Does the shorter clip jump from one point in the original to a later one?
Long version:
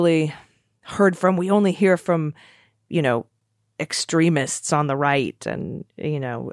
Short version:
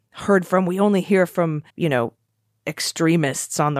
yes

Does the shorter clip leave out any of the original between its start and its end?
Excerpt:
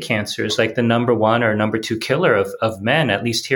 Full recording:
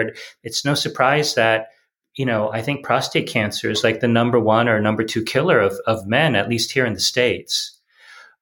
no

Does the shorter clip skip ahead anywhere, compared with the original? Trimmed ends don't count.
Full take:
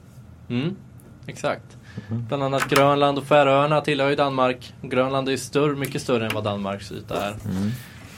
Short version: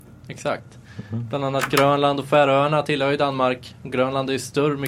no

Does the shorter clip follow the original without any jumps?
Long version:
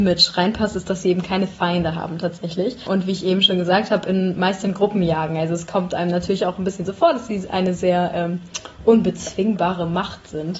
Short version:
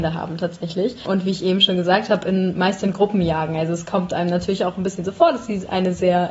yes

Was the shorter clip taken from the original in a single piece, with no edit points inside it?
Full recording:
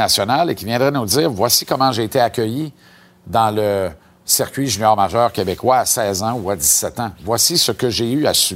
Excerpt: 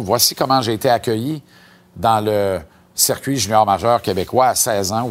yes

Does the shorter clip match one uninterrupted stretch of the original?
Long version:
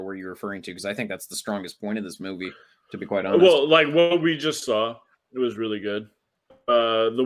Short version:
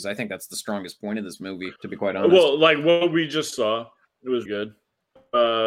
no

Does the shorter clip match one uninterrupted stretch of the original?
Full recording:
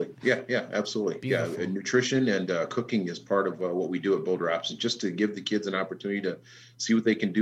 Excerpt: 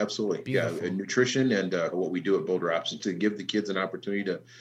no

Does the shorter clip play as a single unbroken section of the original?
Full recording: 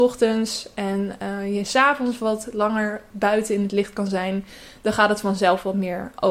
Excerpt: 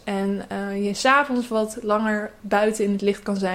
yes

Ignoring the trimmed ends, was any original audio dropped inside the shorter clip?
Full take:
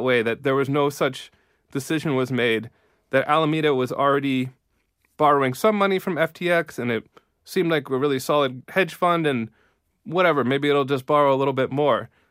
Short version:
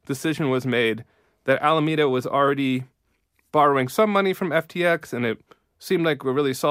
no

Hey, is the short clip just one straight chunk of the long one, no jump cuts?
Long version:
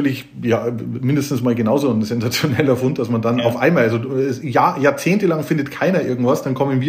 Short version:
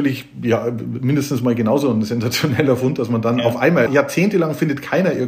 no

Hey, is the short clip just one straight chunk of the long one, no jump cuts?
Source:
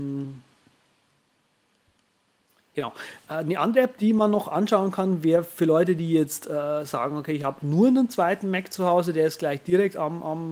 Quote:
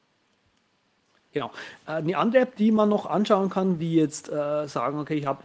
no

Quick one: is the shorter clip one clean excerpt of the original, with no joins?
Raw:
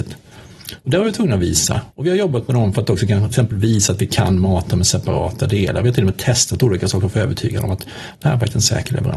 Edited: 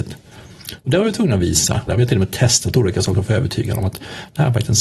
no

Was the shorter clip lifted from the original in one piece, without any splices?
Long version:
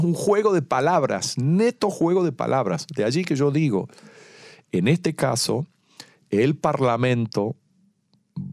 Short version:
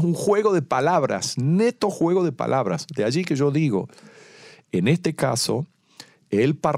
yes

